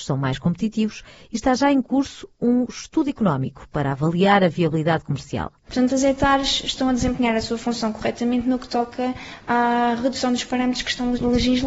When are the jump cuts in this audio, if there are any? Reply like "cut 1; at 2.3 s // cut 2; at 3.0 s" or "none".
cut 1; at 5.7 s